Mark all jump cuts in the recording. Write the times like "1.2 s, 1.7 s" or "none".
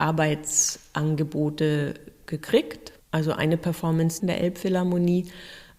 4.2 s